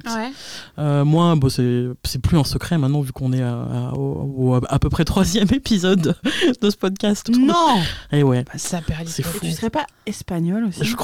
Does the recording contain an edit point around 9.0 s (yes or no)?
no